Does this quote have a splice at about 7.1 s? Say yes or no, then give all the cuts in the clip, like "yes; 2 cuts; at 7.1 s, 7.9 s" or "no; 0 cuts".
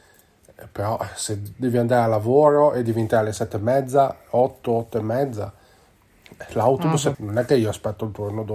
yes; 1 cut; at 7.1 s